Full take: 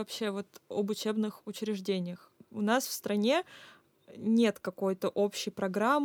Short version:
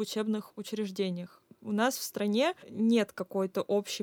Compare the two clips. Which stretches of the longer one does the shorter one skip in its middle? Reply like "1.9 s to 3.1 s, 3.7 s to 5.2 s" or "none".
3.5 s to 4.1 s